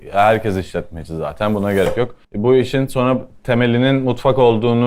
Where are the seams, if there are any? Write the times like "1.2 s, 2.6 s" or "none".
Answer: 2.2 s